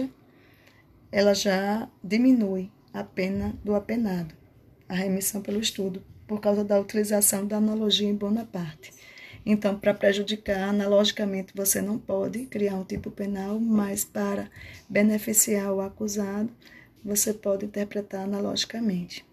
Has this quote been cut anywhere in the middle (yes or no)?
no